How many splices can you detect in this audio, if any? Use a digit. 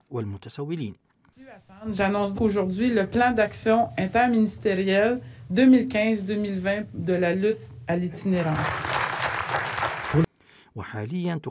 1